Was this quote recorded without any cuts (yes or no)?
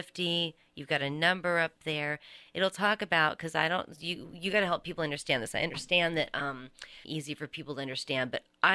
no